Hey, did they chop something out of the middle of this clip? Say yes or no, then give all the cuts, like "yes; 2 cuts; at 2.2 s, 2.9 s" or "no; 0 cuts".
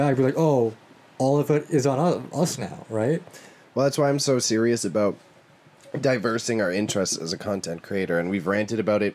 no; 0 cuts